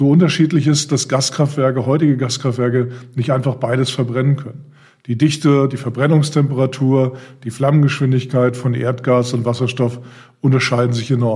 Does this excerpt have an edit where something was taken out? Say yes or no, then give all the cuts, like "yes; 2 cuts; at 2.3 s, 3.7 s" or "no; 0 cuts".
no; 0 cuts